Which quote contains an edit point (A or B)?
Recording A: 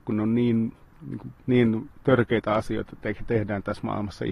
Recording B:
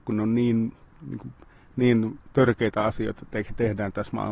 A